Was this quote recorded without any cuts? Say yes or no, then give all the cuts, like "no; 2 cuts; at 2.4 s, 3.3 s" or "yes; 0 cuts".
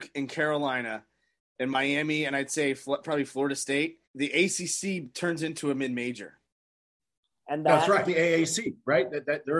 no; 2 cuts; at 4.0 s, 8.1 s